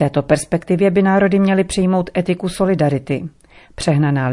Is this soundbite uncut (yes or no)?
yes